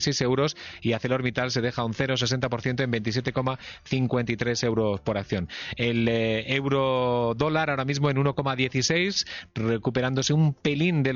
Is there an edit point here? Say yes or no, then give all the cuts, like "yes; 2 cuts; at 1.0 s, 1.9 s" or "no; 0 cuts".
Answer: no; 0 cuts